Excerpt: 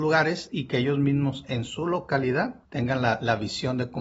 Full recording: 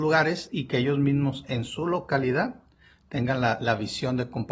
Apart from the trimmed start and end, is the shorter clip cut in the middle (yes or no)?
yes